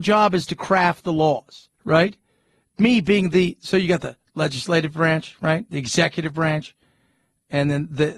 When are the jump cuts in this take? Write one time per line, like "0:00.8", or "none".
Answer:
0:01.7